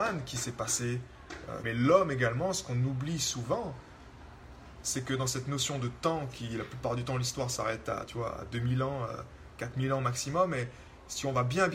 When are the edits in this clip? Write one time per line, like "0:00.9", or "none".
0:01.6